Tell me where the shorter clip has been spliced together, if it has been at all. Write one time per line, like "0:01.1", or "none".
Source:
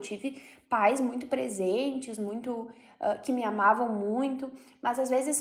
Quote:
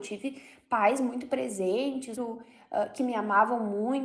0:02.2